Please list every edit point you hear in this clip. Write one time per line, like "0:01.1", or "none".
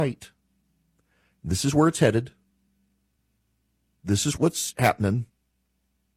0:04.4